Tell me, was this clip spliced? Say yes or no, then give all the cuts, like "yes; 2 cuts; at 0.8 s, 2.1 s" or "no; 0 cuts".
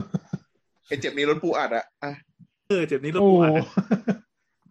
yes; 1 cut; at 2.7 s